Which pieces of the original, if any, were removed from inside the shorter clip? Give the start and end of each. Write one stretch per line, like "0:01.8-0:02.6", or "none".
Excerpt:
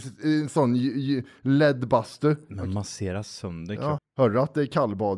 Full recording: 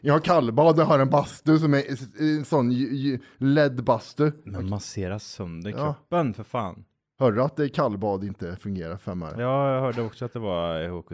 0:05.9-0:07.0